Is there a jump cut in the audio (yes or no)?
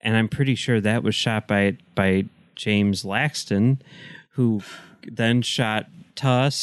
no